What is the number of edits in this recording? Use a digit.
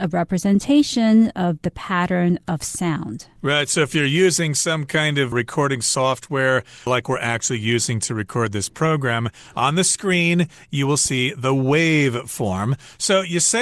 0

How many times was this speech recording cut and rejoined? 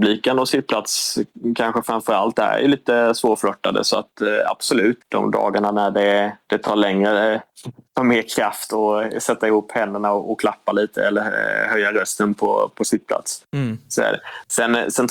1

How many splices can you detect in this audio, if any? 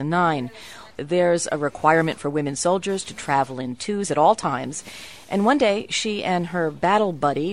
1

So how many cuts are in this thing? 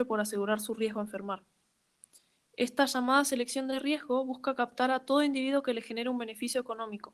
0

